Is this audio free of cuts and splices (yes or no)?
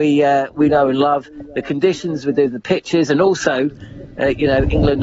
yes